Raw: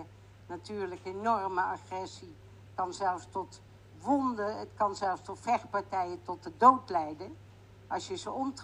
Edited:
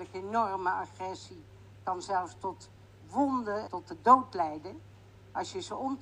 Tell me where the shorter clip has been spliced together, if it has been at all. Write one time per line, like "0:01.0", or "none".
0:03.7